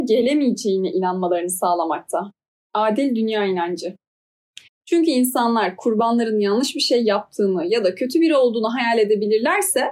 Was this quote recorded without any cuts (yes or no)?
no